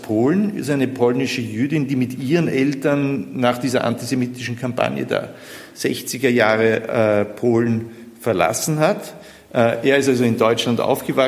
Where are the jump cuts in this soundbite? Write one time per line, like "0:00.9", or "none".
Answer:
none